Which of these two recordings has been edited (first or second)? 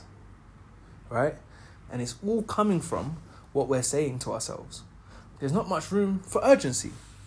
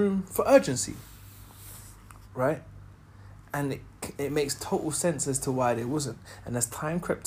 first